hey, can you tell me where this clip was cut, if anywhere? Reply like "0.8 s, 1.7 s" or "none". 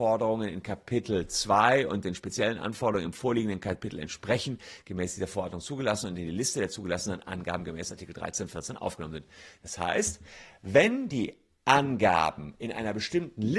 none